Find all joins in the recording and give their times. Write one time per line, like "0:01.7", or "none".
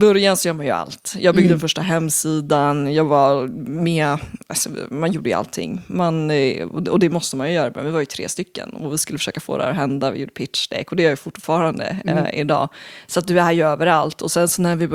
none